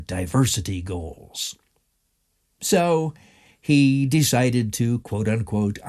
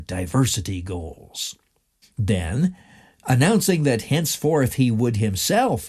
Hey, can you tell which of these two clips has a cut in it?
second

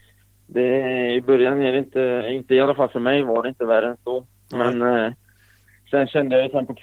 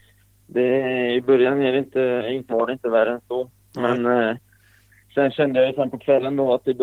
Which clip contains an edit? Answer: second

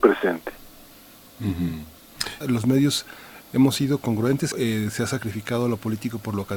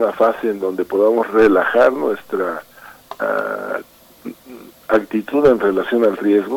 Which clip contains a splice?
first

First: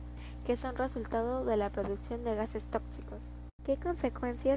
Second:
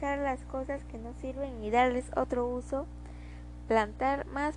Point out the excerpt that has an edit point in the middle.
first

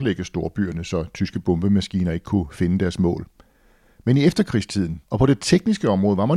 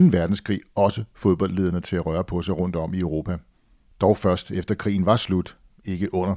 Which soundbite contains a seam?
first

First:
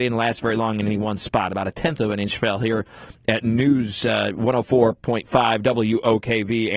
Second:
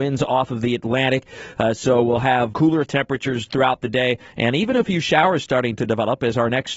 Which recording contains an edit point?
second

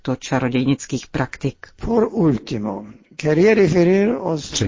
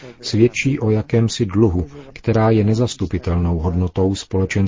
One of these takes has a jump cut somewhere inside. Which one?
second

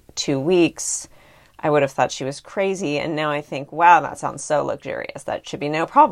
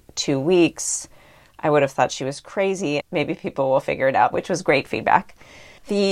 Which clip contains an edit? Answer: second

